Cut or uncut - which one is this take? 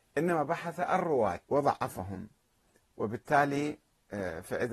cut